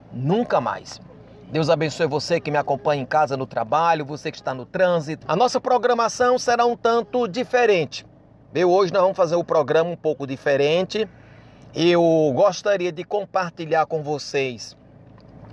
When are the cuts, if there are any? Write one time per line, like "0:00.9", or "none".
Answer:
0:05.2